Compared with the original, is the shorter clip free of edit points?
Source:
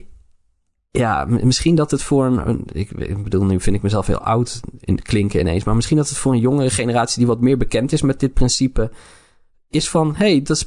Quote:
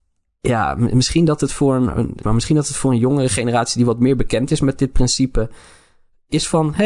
no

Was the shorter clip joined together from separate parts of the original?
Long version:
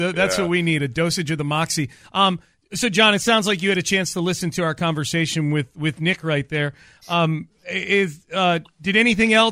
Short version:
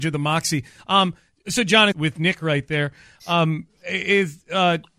yes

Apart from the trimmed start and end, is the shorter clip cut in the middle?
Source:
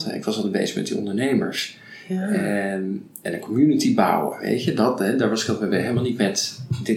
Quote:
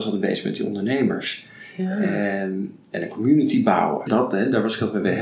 yes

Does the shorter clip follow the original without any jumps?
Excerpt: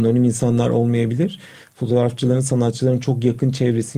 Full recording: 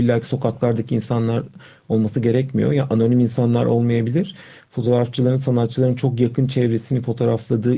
yes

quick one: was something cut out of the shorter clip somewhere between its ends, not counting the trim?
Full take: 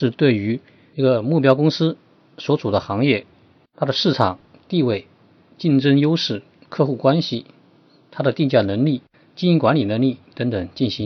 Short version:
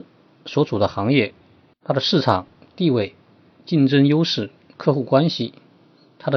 no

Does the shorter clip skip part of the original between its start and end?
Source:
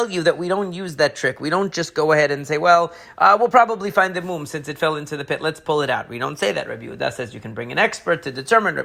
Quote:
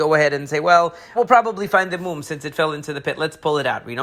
yes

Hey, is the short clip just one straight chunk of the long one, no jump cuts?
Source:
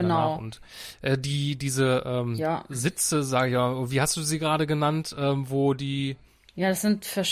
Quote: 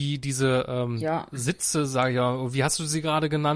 yes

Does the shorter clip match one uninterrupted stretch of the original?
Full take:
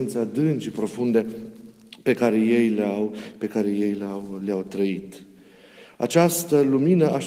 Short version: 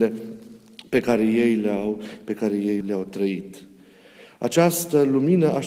no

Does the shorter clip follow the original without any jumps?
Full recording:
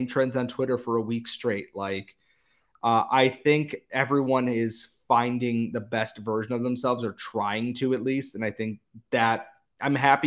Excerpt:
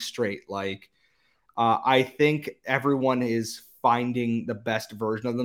yes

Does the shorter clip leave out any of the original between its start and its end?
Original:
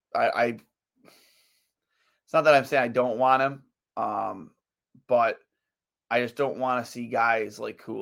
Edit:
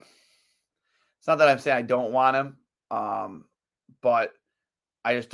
no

